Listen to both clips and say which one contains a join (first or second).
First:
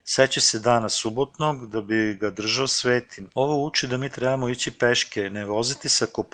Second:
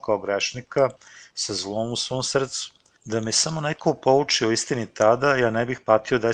first